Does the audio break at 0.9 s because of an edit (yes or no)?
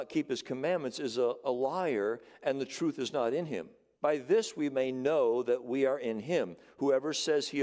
no